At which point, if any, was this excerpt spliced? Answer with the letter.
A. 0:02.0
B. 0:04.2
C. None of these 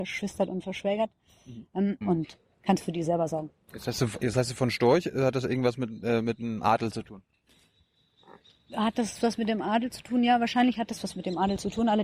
A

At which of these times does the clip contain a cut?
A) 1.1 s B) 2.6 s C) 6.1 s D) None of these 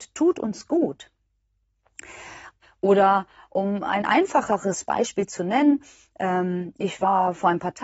B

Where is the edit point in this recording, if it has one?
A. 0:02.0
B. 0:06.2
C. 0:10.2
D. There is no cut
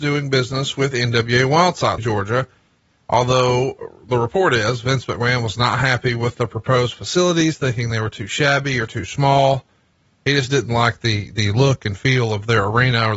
A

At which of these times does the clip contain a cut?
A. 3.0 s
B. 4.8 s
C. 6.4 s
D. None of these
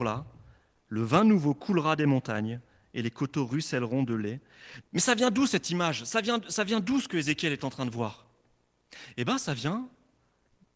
B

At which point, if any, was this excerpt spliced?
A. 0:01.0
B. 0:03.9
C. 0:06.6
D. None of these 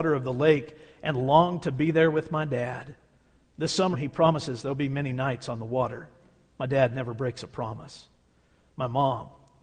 B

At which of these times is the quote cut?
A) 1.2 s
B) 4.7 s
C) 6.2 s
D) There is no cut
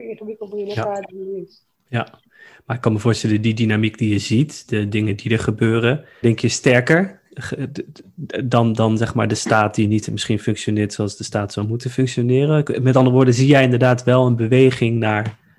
C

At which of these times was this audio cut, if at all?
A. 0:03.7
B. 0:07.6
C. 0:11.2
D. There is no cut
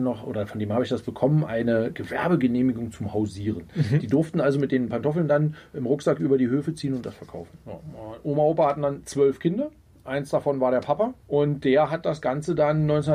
C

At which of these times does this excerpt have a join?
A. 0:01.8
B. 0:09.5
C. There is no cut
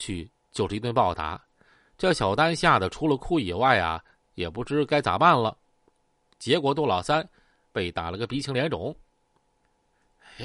C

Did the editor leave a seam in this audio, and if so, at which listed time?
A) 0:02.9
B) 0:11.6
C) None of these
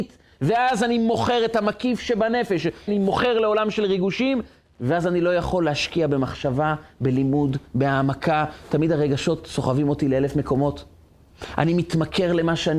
A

